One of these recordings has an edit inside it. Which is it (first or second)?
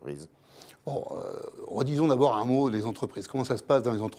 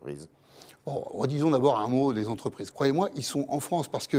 second